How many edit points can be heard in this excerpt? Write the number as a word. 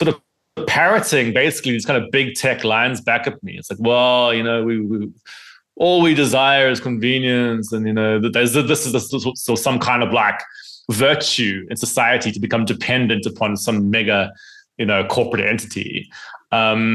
one